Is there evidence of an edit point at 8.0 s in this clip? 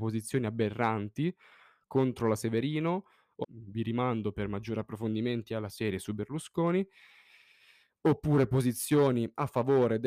no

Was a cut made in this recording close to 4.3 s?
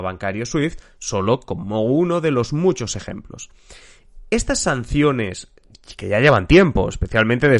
no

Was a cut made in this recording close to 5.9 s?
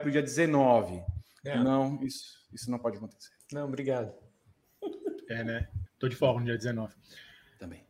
yes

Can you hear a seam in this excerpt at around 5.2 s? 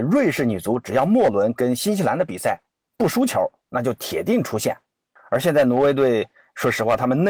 yes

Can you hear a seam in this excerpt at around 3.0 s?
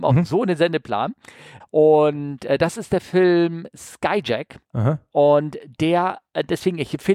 no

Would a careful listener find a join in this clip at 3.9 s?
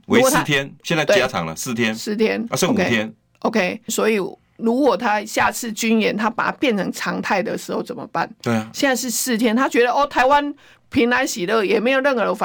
yes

